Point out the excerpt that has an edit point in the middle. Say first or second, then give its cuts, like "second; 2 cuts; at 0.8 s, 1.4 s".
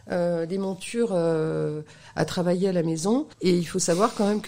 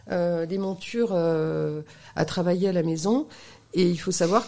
first; 1 cut; at 3.3 s